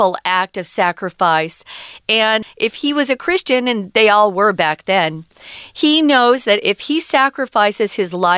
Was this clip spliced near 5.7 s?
no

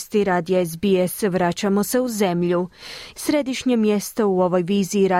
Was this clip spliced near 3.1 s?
yes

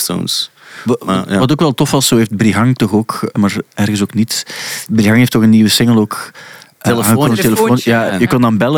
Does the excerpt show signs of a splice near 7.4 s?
no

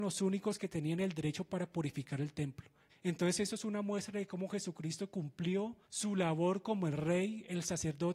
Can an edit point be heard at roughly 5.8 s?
yes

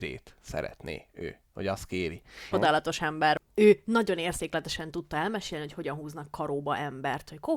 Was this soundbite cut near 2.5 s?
yes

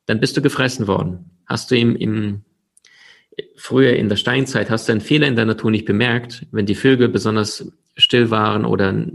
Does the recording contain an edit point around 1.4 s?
yes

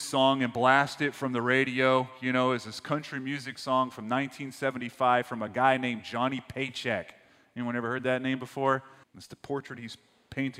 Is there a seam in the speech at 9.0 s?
yes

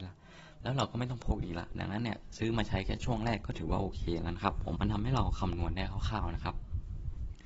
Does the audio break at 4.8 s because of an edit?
yes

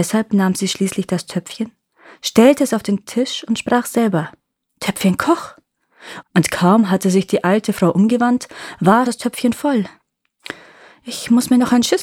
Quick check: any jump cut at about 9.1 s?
yes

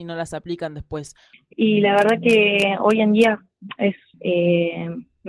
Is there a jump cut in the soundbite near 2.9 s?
no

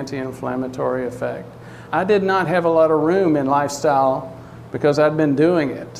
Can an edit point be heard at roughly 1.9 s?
yes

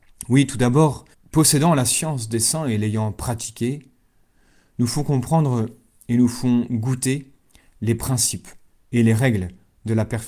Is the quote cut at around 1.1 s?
yes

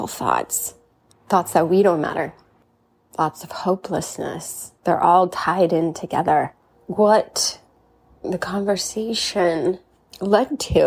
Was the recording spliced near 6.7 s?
yes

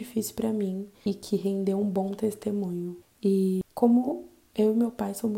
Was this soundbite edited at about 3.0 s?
yes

